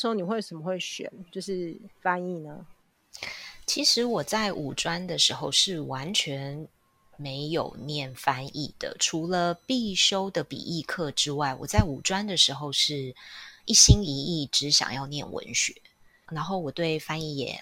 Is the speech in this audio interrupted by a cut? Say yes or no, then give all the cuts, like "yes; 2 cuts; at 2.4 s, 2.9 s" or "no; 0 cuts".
yes; 1 cut; at 16.2 s